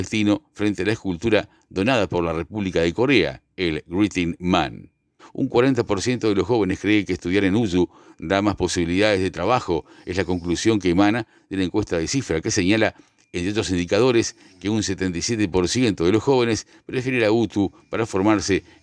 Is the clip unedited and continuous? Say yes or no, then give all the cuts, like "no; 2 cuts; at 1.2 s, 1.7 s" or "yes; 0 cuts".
no; 1 cut; at 5.2 s